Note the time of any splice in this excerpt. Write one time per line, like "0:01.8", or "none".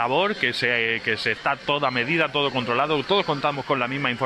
0:03.1

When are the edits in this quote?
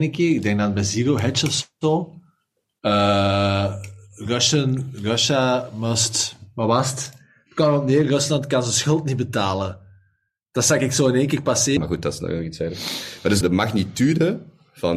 0:11.8
0:13.4

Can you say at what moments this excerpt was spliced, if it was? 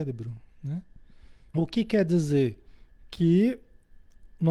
0:01.5

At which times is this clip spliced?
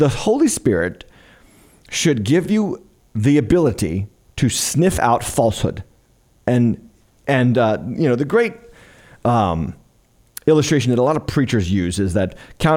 none

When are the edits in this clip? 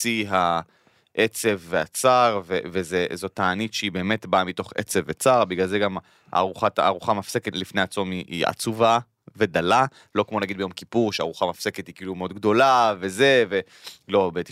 0:07.5

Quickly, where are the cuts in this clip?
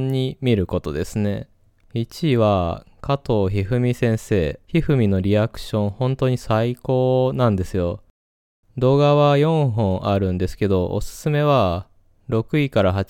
0:04.6
0:08.6

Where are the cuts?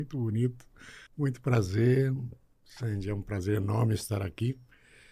0:01.1

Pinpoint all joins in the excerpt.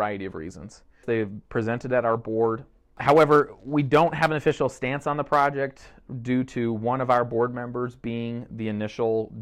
0:01.0

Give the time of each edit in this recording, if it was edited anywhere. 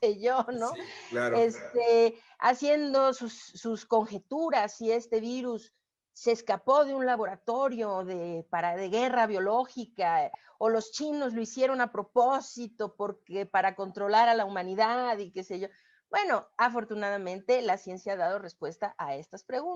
none

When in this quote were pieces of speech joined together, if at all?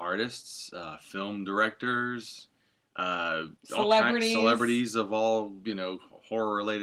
0:03.6

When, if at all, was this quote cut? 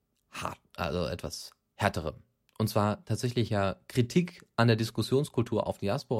none

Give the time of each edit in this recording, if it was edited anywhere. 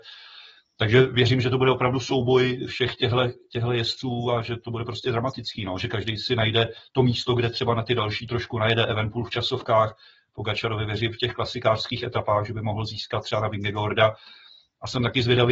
none

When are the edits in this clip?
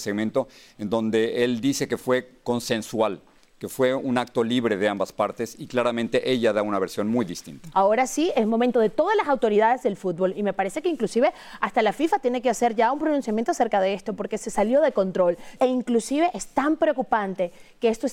0:07.7
0:15.6

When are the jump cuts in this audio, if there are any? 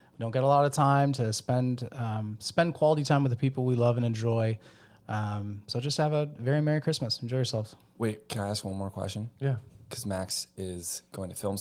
none

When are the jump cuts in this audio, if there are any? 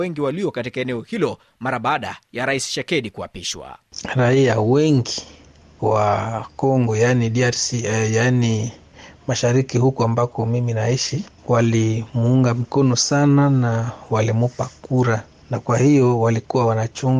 none

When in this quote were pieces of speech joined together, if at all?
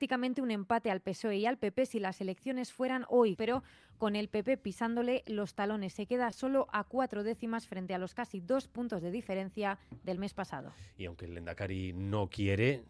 0:03.4

